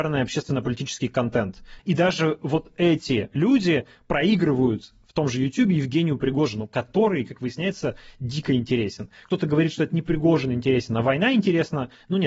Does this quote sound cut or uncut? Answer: cut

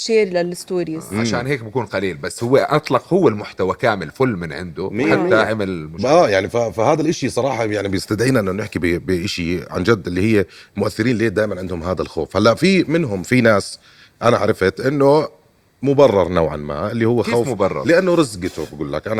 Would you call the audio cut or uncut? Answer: uncut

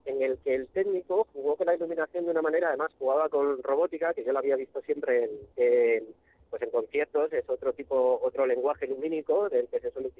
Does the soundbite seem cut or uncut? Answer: cut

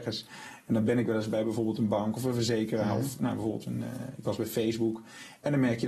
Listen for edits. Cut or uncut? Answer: uncut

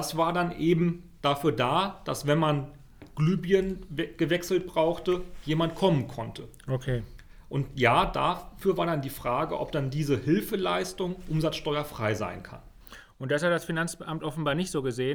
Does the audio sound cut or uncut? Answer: uncut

